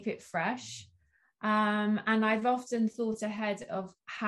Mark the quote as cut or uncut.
uncut